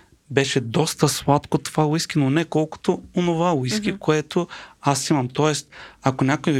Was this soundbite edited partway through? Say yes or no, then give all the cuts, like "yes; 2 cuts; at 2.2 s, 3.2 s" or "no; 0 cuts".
no; 0 cuts